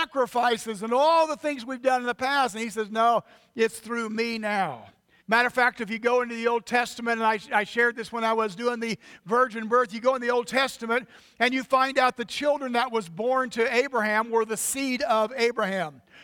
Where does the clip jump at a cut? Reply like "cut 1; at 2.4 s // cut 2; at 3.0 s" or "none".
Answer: cut 1; at 5.2 s